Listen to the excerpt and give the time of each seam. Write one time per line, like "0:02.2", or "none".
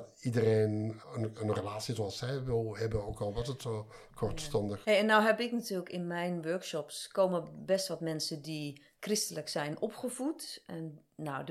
0:01.0
0:04.8